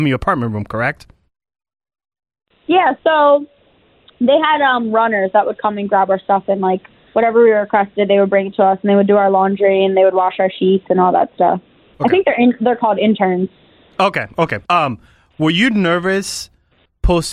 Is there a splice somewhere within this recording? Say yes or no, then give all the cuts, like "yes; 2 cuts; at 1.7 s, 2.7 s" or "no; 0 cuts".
yes; 2 cuts; at 11.9 s, 14.7 s